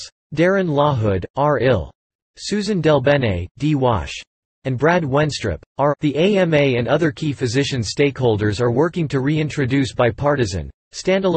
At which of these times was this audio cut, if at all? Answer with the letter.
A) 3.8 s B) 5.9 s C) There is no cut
B